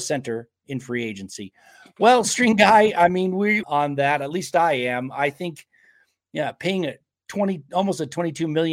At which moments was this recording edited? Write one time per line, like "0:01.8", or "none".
0:03.6

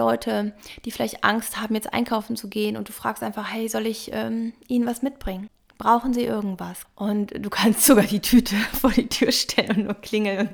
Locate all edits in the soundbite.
0:06.8

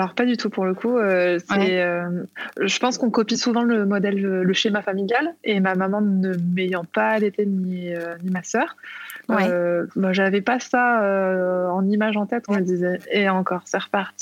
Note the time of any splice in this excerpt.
0:12.5

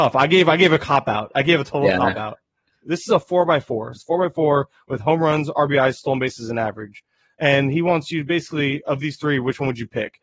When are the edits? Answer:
0:02.8
0:03.9

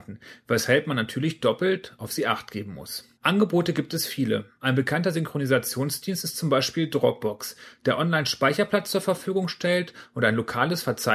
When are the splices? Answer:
0:03.2

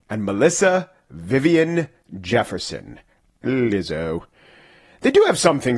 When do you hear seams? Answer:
none

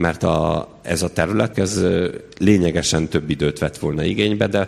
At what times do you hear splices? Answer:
0:01.5

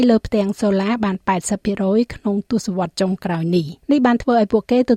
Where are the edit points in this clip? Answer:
0:03.8

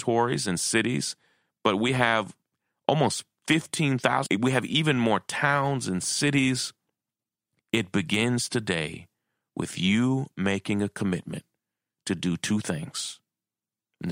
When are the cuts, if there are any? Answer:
0:04.3
0:07.6

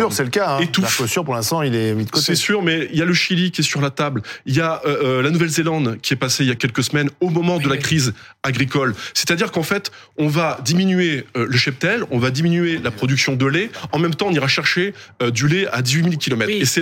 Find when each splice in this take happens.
0:06.6

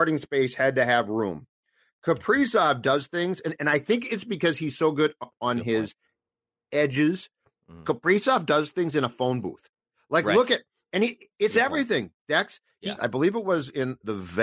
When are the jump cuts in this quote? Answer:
0:13.0

